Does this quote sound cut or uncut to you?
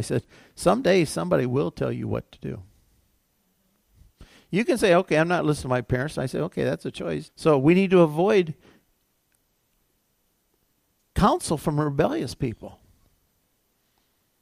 cut